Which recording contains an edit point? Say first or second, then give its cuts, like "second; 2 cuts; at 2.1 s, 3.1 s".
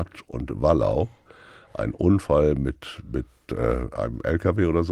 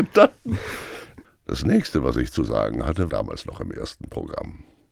second; 2 cuts; at 1.2 s, 3.1 s